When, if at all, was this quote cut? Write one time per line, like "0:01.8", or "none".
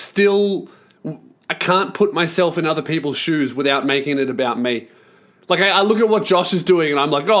none

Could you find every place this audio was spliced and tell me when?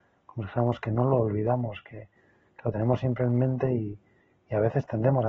none

